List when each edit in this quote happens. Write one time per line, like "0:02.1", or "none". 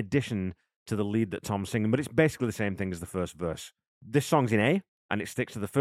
0:03.9

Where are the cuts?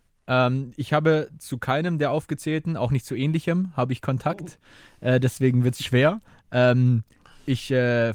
none

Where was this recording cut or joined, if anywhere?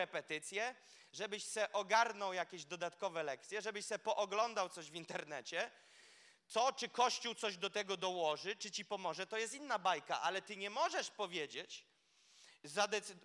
none

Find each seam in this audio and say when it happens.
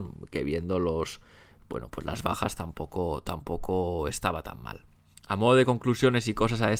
none

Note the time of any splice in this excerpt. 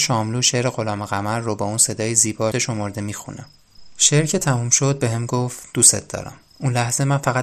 0:02.5

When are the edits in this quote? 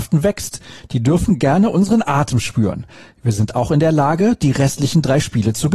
none

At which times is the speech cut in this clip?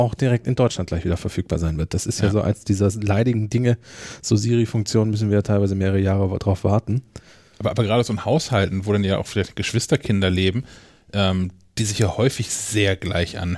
none

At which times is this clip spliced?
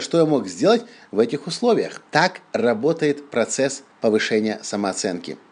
0:02.1
0:03.9

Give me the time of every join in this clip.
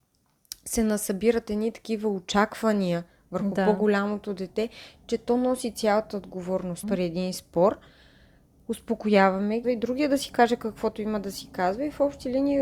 0:06.8
0:09.6

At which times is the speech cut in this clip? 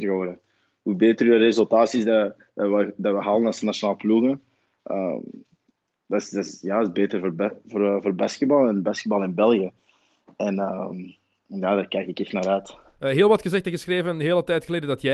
none

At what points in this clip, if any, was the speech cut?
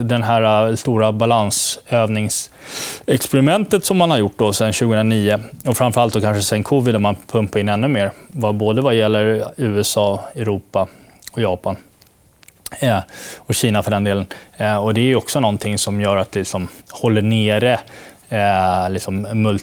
0:14.5
0:16.8

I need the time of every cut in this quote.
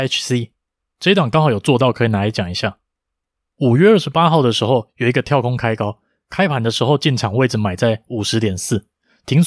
none

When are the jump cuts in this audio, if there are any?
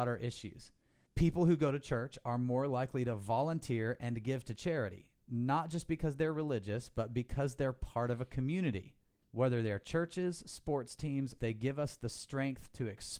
0:01.1
0:09.3
0:11.4

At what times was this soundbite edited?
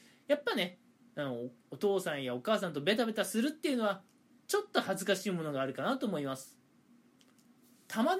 none

